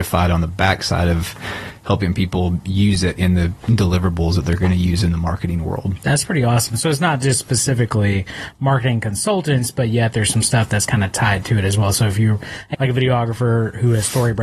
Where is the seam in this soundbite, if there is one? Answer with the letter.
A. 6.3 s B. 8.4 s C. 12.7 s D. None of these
C